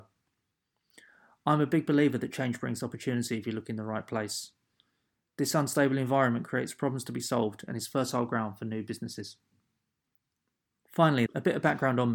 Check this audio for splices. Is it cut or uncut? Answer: cut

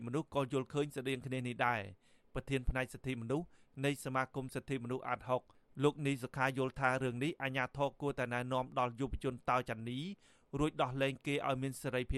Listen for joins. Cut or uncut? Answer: uncut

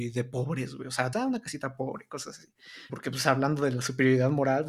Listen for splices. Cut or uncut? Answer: cut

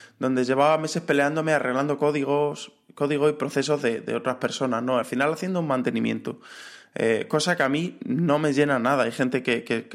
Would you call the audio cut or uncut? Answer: uncut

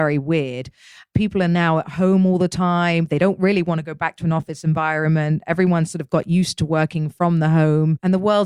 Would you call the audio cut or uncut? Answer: uncut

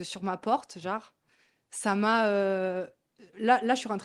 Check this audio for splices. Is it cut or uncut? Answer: uncut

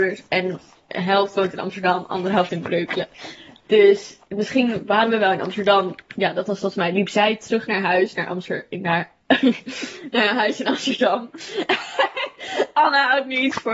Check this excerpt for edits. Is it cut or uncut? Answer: uncut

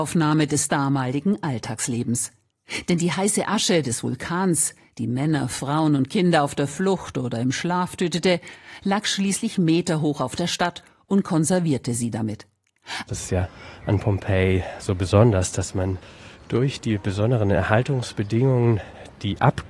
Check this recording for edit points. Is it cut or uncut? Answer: cut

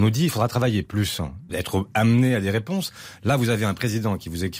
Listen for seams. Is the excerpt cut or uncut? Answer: cut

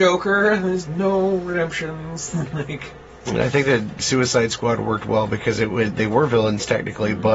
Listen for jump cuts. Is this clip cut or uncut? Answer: cut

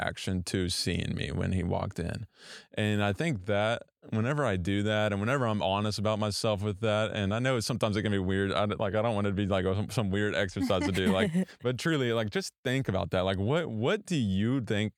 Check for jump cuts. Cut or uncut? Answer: uncut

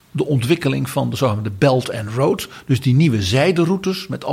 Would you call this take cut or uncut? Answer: uncut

